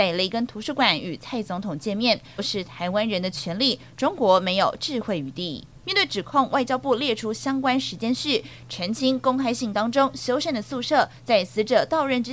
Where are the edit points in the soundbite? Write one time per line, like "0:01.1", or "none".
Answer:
0:02.4
0:05.8